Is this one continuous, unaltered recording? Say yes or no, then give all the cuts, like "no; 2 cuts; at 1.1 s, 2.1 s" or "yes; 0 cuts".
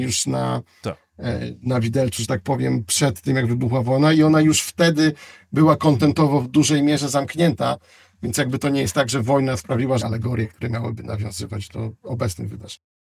no; 1 cut; at 10.0 s